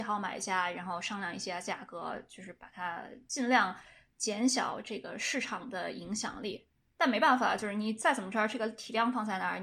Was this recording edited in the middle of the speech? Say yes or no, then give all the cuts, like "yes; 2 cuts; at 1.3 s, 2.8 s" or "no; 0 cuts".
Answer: no; 0 cuts